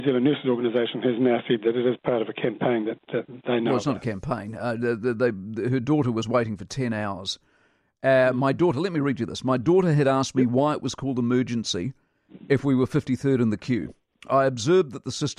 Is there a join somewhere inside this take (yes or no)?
no